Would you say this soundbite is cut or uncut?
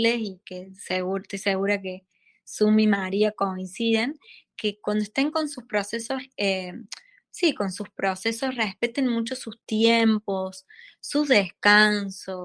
uncut